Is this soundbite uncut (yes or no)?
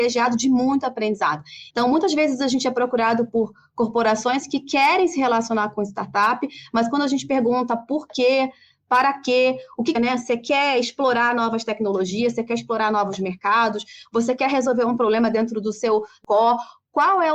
no